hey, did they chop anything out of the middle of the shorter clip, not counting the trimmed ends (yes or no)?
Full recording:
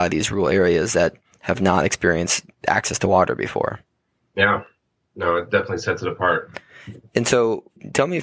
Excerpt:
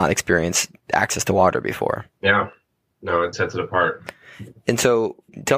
yes